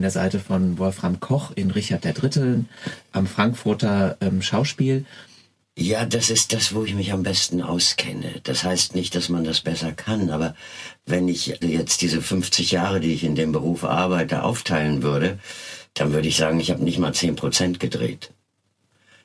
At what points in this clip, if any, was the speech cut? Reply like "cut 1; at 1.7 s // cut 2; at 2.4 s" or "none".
cut 1; at 5.6 s // cut 2; at 11.6 s